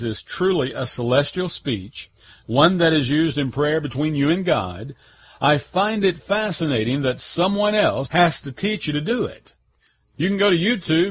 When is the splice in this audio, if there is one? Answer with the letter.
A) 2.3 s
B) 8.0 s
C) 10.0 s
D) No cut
B